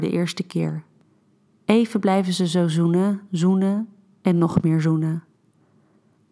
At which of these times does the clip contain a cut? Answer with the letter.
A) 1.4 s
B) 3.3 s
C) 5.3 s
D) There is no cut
B